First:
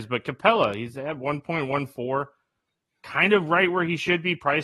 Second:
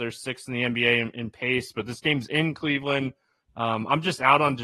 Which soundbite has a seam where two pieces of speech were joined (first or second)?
second